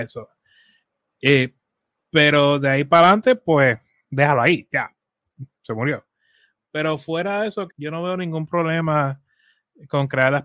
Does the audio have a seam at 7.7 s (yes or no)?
yes